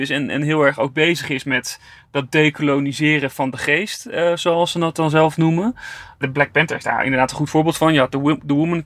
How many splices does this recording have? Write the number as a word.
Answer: zero